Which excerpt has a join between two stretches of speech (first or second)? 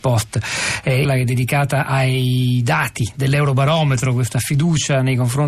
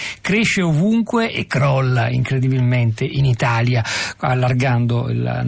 first